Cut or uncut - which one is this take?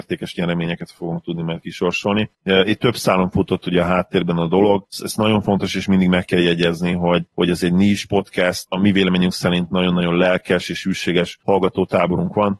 uncut